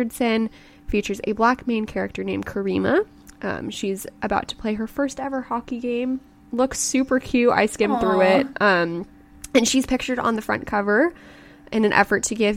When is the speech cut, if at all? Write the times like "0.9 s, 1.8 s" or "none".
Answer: none

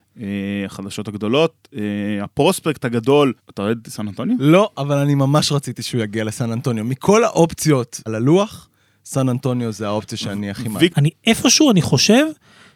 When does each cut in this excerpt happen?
3.4 s, 8.1 s, 10.9 s

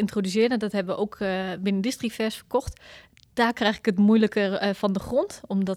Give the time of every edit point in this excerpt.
none

